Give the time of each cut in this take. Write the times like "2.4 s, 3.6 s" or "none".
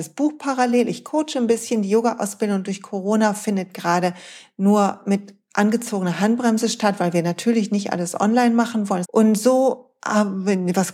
9.0 s